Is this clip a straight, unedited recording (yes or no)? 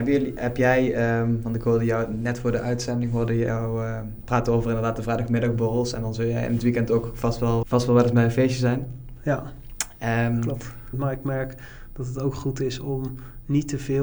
no